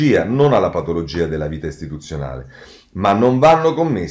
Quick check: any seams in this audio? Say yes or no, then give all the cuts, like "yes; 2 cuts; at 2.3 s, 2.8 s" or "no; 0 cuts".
no; 0 cuts